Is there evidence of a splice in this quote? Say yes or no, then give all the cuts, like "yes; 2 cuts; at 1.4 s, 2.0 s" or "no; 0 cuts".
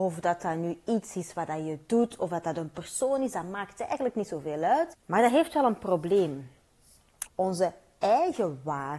yes; 2 cuts; at 4.9 s, 7.3 s